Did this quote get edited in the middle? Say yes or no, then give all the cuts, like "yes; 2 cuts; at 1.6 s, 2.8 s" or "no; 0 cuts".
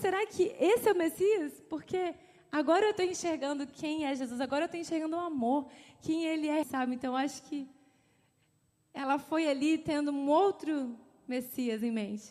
yes; 1 cut; at 6.6 s